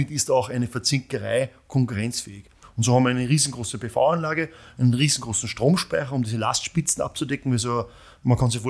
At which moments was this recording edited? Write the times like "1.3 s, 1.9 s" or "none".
2.6 s